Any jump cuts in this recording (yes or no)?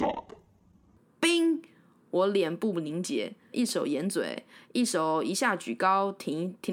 yes